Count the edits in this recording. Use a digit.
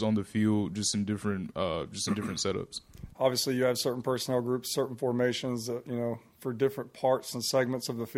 1